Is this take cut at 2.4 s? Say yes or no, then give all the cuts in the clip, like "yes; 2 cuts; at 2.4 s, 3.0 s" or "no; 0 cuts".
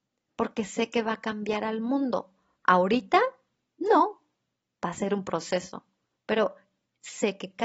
no; 0 cuts